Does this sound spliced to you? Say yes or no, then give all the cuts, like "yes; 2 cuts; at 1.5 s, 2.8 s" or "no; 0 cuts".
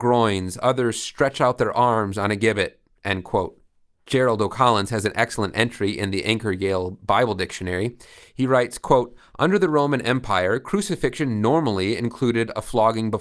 no; 0 cuts